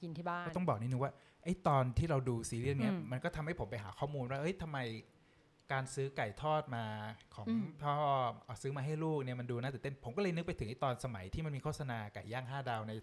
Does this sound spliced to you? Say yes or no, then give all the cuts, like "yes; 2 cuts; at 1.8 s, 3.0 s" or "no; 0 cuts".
no; 0 cuts